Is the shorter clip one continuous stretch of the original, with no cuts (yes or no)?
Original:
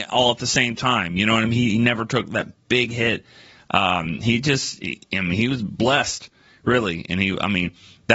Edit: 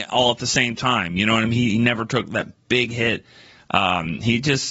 yes